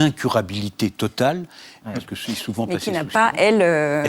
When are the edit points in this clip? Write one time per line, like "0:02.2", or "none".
0:01.9